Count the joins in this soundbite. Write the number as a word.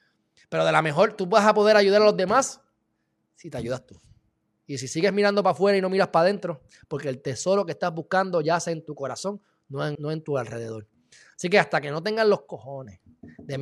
two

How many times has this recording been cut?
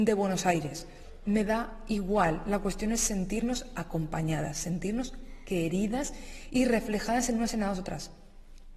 zero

